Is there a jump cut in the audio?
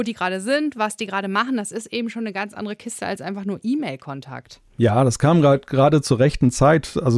no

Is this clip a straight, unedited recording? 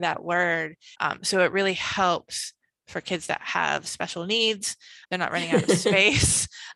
no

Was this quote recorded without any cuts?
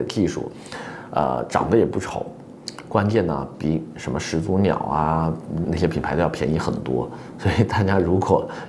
no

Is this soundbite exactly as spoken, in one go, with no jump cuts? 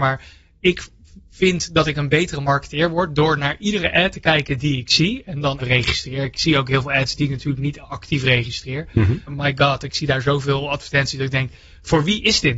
no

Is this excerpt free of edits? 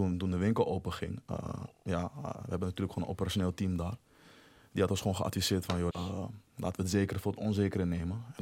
no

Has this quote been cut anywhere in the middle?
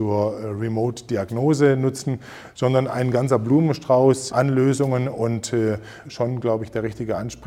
yes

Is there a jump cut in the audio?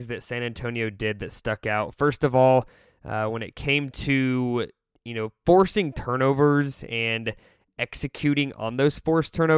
no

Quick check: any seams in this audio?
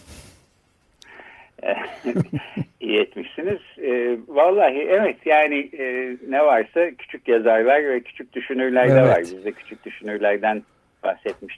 no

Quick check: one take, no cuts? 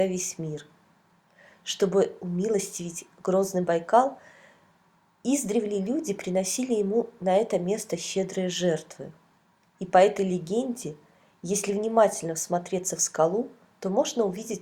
yes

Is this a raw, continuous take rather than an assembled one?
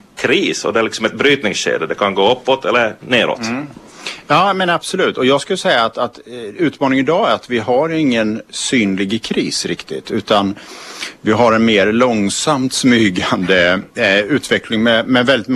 yes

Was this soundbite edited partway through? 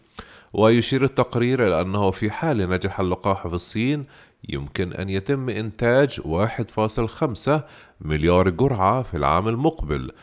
no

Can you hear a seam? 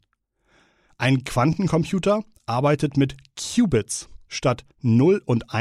no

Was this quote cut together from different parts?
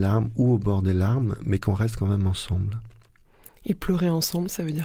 no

